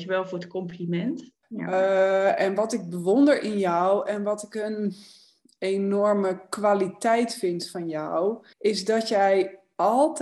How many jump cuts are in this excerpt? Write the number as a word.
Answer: two